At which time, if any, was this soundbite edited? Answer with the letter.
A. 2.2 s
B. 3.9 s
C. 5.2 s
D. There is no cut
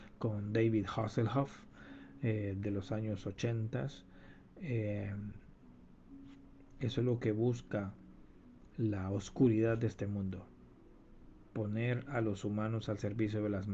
D